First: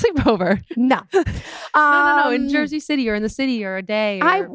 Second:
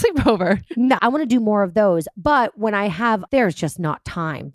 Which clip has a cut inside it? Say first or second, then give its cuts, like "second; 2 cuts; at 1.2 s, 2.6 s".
second; 2 cuts; at 1.0 s, 3.3 s